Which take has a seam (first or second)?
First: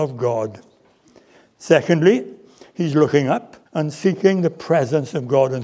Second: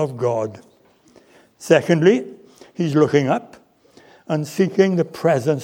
first